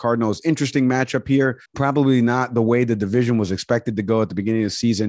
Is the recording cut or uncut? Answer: cut